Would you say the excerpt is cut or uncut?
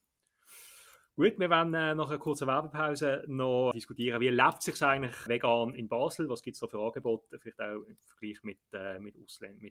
cut